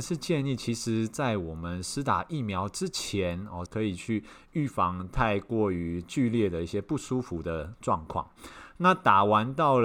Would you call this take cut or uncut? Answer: cut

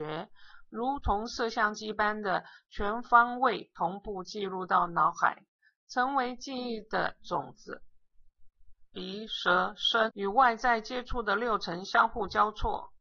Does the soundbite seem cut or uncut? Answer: cut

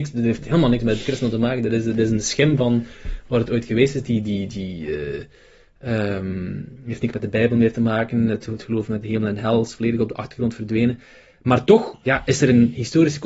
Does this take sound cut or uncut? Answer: uncut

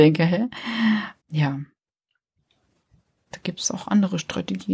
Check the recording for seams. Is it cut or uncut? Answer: cut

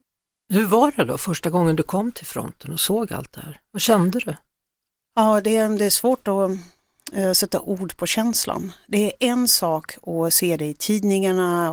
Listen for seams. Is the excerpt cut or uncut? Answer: uncut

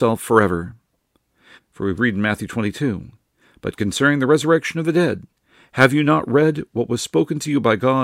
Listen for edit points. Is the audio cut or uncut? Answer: cut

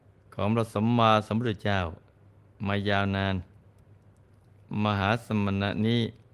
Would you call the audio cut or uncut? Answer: uncut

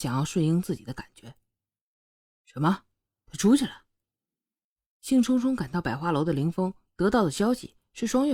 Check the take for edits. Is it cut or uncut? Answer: uncut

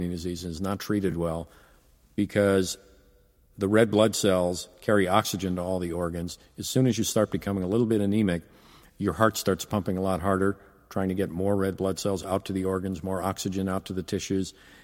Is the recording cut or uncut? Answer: uncut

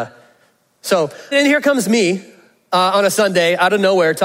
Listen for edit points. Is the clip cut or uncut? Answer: cut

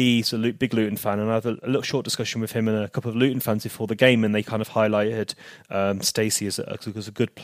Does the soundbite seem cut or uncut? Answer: uncut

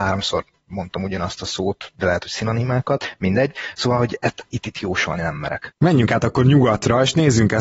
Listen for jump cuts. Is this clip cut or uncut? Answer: cut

